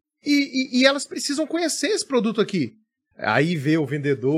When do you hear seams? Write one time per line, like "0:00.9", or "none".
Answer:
0:03.1